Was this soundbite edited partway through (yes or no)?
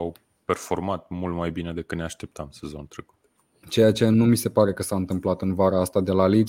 yes